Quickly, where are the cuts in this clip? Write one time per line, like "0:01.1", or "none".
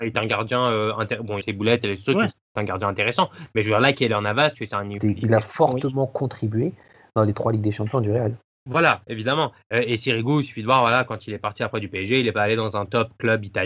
0:01.4
0:05.0